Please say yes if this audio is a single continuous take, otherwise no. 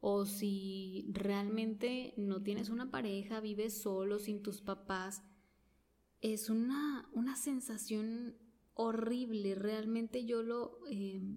yes